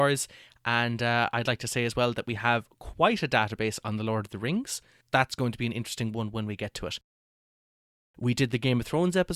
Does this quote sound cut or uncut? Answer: cut